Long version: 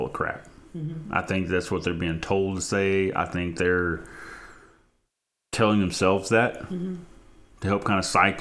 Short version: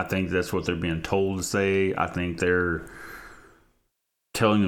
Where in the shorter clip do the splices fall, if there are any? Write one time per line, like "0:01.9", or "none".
none